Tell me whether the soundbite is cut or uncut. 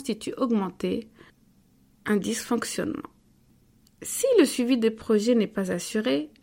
uncut